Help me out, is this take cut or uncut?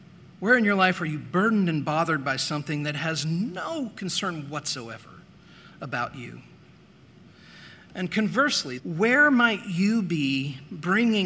cut